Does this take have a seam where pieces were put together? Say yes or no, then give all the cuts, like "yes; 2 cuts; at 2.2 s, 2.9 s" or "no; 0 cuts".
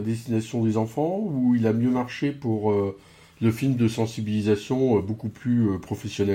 no; 0 cuts